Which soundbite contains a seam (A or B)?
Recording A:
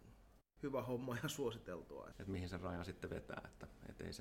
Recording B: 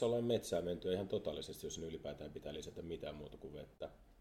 A